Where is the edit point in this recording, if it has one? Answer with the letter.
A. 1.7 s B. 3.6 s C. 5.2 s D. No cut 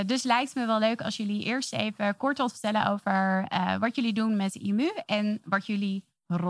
D